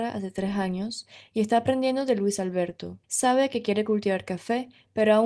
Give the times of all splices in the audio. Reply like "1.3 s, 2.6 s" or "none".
3.0 s